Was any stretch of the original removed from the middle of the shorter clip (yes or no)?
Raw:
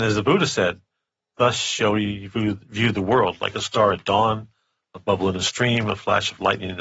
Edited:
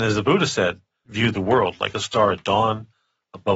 yes